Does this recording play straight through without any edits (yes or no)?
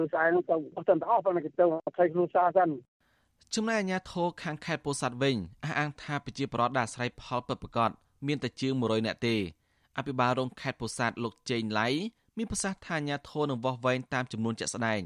yes